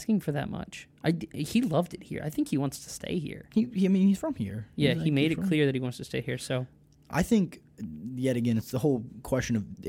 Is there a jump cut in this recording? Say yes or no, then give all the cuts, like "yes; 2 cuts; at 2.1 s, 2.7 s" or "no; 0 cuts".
no; 0 cuts